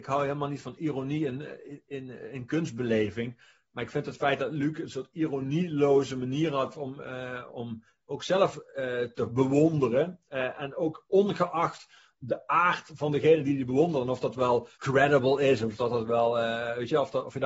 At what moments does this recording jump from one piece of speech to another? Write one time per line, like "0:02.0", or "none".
0:07.5
0:14.7